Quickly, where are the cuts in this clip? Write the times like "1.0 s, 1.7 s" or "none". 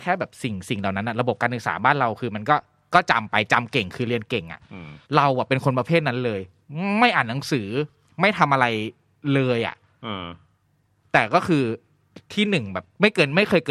5.1 s, 12.2 s